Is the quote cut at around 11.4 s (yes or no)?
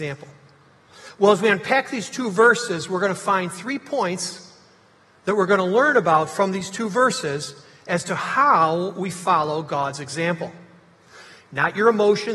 yes